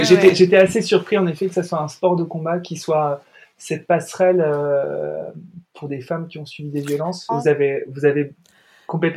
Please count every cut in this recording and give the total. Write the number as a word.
one